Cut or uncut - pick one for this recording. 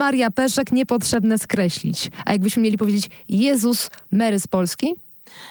cut